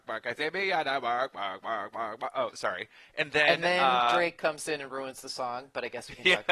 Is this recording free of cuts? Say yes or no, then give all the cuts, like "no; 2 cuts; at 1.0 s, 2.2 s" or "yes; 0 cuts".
yes; 0 cuts